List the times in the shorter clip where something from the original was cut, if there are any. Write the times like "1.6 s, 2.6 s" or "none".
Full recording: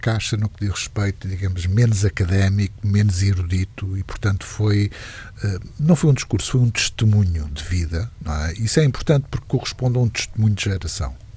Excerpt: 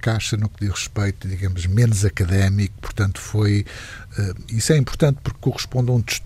2.8 s, 4.5 s